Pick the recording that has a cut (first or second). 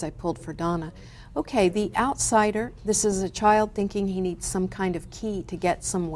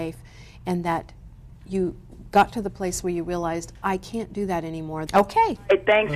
second